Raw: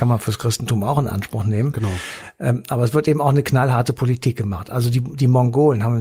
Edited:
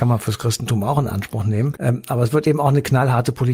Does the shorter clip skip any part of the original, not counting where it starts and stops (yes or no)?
yes